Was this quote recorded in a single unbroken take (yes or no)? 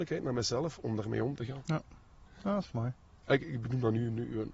yes